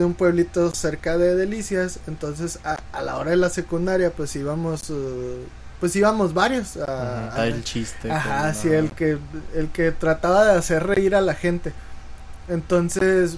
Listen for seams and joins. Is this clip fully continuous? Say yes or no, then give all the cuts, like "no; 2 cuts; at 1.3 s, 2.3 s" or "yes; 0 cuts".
no; 1 cut; at 7.3 s